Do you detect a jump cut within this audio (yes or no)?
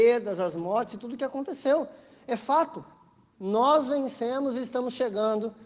yes